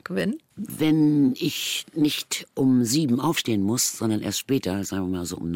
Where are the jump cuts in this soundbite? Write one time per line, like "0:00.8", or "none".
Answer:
none